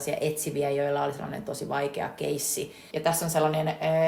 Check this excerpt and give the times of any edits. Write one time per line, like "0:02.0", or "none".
0:02.9